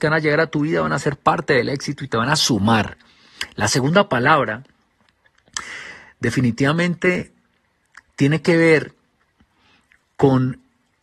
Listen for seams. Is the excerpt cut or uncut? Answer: uncut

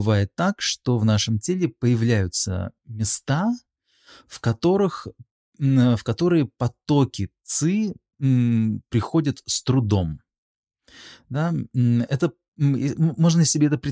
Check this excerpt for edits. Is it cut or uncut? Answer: uncut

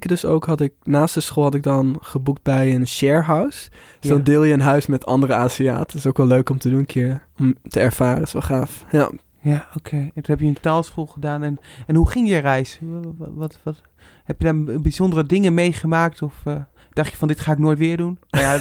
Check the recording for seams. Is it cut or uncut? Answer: uncut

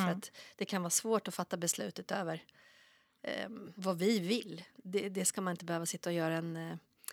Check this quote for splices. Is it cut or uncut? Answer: cut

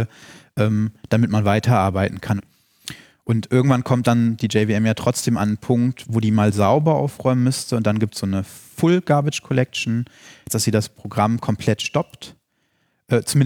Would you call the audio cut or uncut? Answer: cut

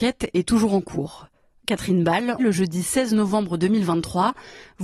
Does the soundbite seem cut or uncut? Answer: cut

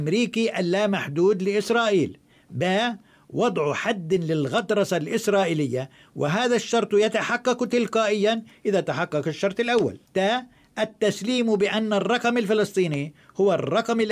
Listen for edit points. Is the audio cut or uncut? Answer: cut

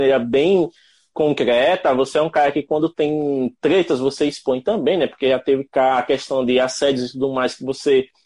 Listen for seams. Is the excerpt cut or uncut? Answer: uncut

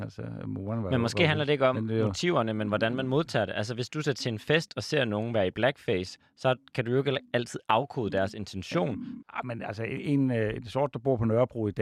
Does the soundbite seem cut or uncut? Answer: cut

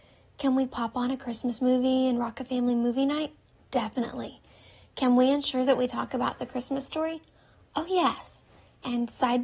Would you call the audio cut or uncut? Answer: uncut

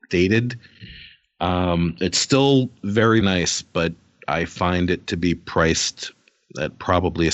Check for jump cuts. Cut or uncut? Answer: cut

